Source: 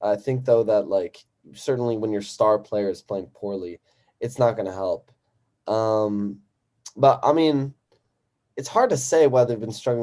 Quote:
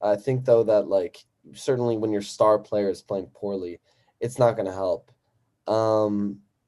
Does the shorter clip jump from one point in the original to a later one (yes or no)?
no